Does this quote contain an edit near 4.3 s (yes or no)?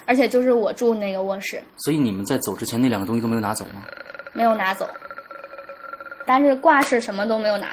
no